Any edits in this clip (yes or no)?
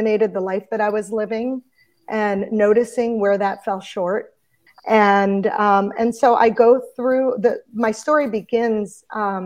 yes